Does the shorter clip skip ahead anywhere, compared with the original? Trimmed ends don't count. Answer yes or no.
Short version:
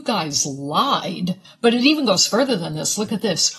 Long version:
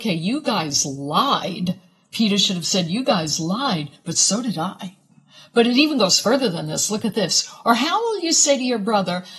yes